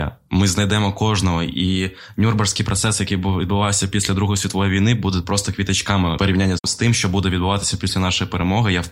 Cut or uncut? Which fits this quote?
uncut